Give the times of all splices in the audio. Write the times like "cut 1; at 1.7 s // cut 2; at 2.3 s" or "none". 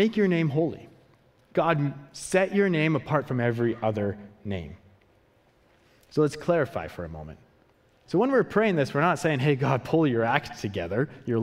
cut 1; at 8.1 s